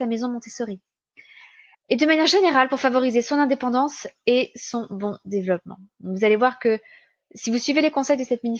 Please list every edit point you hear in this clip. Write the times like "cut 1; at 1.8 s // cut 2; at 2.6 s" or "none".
cut 1; at 1.7 s